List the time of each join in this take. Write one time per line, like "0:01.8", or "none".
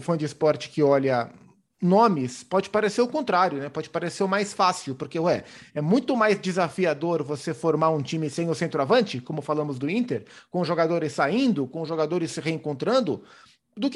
none